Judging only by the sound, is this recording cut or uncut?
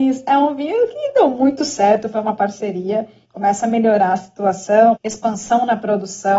cut